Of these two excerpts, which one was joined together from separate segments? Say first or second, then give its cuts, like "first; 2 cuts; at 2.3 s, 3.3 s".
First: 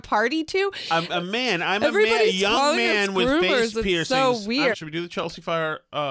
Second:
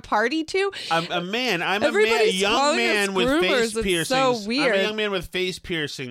first; 1 cut; at 4.7 s